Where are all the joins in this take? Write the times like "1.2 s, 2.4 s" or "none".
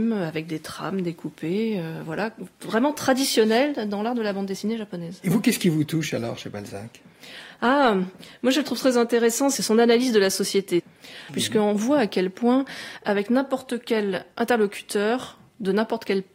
2.5 s, 11.3 s